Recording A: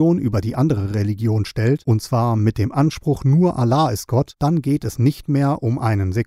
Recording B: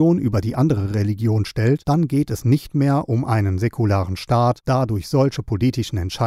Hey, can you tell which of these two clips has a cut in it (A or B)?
B